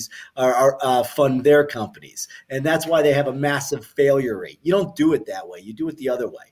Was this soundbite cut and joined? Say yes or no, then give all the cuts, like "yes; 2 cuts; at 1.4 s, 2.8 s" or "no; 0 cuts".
no; 0 cuts